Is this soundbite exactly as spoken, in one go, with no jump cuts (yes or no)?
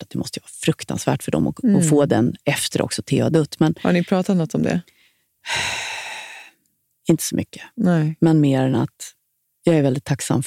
yes